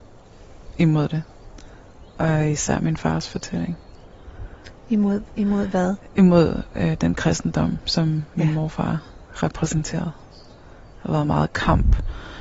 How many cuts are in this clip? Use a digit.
0